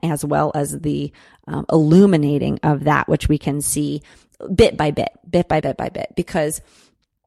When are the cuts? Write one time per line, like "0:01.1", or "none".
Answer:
0:05.6